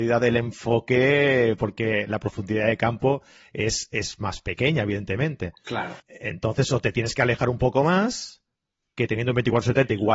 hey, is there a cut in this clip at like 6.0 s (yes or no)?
yes